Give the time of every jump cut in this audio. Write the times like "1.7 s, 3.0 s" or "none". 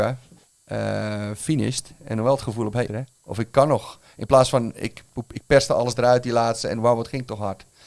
2.9 s